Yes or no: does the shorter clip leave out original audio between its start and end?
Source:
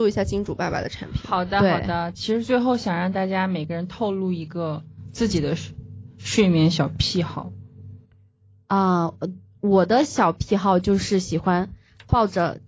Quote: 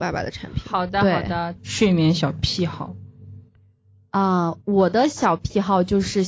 yes